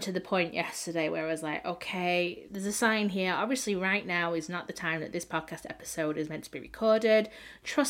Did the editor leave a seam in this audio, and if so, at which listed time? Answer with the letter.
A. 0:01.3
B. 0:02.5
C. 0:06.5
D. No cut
B